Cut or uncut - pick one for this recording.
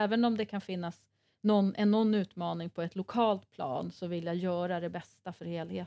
uncut